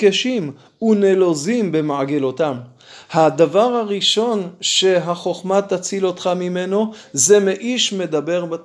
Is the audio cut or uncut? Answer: uncut